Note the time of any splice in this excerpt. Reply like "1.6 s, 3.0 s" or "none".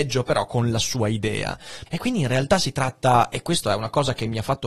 1.9 s